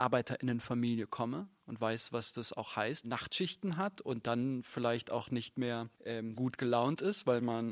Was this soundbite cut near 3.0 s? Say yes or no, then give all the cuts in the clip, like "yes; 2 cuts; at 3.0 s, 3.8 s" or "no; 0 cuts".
yes; 2 cuts; at 3.0 s, 6.3 s